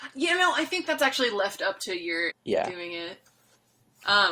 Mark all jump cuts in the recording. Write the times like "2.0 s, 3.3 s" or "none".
2.3 s